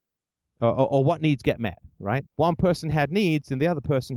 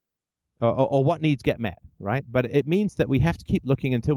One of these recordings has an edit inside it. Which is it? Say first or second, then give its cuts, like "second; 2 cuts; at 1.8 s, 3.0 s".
first; 1 cut; at 2.3 s